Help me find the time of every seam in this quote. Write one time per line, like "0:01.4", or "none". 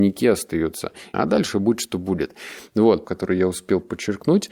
0:01.1
0:03.0